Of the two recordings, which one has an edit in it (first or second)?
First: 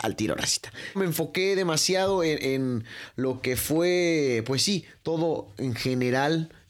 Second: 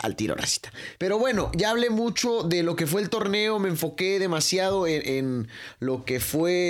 first